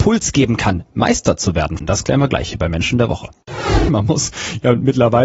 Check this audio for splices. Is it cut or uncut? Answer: cut